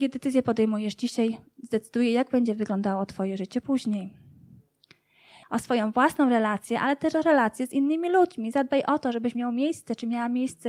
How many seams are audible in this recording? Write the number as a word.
one